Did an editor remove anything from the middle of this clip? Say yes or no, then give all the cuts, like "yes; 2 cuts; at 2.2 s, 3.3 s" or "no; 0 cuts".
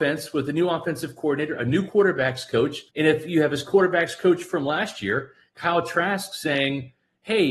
yes; 1 cut; at 2.9 s